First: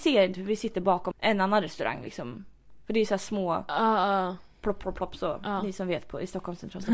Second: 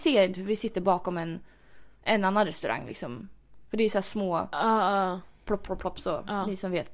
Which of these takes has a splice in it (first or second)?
first